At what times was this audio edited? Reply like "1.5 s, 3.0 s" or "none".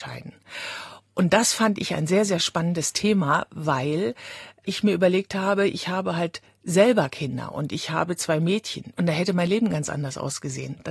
8.9 s